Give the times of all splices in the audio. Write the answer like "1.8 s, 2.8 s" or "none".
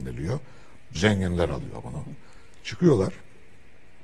0.9 s